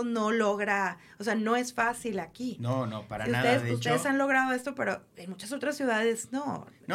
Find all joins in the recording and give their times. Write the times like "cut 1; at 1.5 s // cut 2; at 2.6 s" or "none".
cut 1; at 5.1 s